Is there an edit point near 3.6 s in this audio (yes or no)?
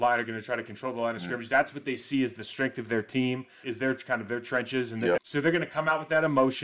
yes